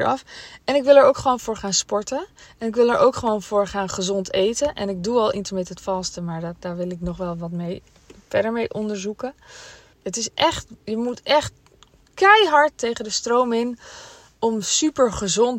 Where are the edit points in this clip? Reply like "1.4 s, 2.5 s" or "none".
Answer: 9.9 s

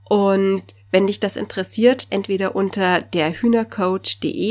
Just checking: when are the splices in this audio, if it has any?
2.1 s

